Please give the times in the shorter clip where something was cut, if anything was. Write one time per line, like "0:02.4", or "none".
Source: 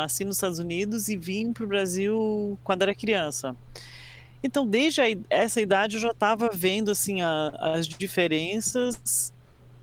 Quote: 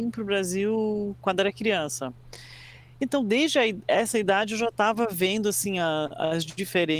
none